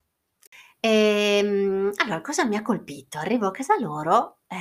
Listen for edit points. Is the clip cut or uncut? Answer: uncut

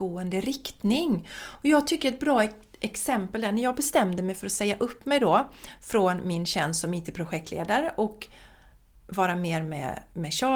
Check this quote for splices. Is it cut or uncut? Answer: uncut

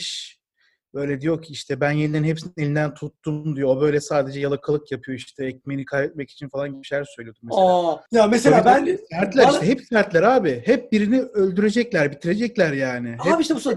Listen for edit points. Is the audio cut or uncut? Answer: cut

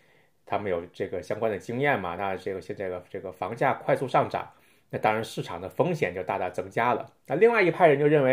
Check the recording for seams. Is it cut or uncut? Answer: uncut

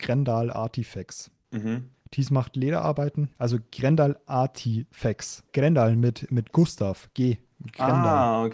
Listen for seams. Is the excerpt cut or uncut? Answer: cut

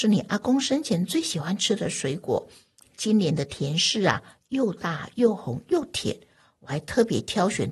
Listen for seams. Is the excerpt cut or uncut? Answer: uncut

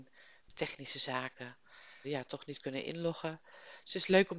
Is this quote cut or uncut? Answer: cut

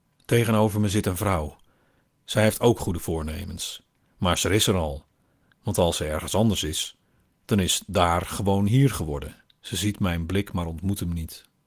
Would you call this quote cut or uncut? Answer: cut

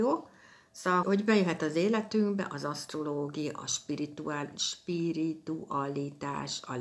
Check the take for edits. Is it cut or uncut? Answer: cut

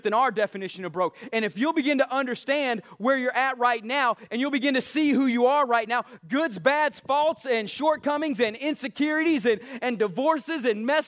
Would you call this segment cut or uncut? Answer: uncut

